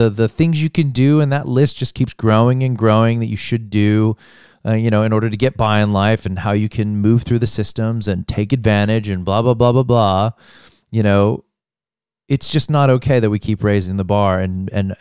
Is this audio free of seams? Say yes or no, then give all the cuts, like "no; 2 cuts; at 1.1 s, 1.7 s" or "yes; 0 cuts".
yes; 0 cuts